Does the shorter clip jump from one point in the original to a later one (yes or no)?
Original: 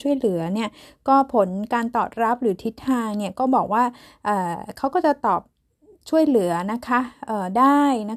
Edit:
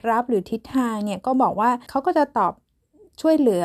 yes